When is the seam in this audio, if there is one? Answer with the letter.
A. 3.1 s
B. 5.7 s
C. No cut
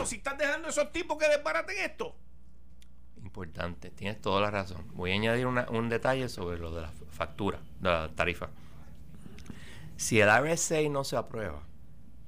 C